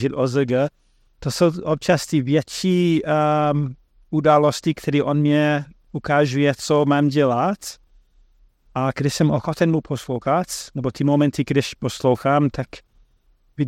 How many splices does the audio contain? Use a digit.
0